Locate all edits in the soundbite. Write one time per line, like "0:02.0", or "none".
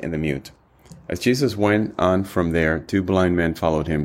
none